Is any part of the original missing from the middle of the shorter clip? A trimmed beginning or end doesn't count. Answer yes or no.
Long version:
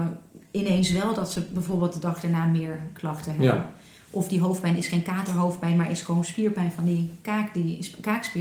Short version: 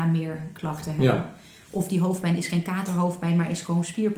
no